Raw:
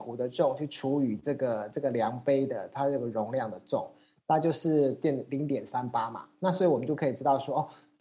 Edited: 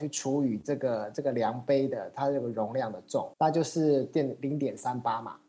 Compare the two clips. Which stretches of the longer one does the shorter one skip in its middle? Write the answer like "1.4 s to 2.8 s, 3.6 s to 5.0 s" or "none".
3.9 s to 4.2 s